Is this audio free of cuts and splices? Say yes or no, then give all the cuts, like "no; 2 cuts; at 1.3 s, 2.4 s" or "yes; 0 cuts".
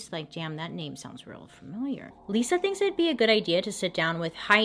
no; 1 cut; at 2.1 s